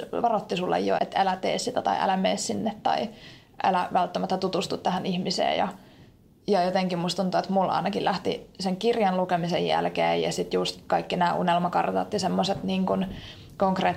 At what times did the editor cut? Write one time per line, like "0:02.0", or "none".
0:01.0